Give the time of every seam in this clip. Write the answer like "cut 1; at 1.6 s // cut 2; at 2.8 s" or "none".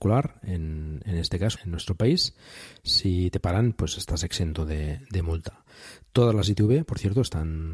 cut 1; at 1.6 s